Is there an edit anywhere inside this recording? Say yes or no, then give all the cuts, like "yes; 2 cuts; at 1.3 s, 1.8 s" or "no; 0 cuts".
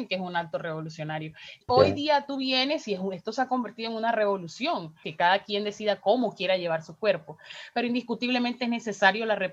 yes; 2 cuts; at 1.7 s, 5.0 s